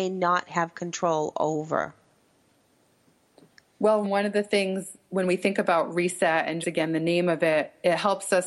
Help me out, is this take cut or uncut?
cut